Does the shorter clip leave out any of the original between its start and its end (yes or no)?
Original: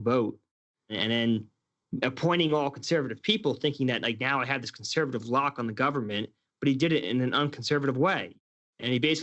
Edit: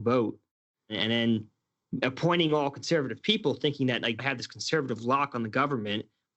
yes